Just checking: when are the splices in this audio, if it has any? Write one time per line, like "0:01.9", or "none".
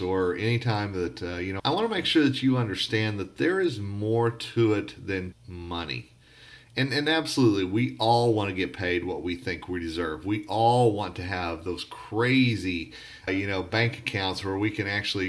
0:01.6
0:05.3
0:13.3